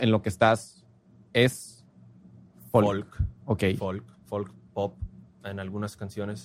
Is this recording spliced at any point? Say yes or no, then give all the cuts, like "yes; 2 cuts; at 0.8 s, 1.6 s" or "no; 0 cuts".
yes; 1 cut; at 3.4 s